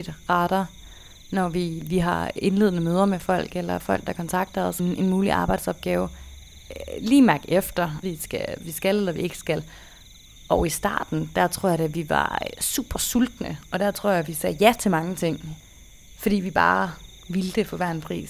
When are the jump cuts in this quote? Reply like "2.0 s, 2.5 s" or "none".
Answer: 4.8 s, 8.0 s